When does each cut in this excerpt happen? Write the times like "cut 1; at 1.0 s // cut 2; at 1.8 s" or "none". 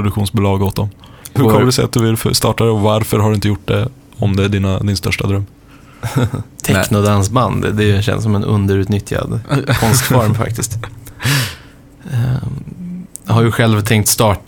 cut 1; at 1.4 s // cut 2; at 6.6 s